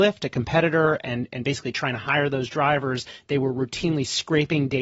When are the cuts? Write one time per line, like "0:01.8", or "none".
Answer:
none